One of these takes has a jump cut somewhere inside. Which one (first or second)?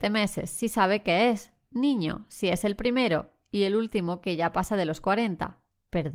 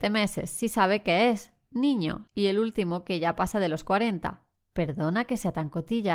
second